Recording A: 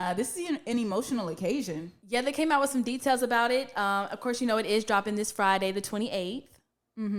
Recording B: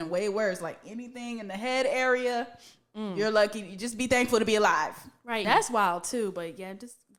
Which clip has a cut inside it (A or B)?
B